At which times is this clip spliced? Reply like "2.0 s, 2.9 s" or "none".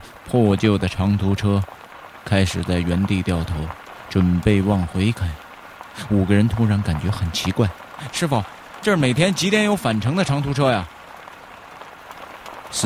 8.1 s